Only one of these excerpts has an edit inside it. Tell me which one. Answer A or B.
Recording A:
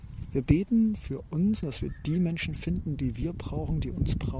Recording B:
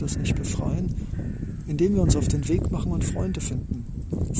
A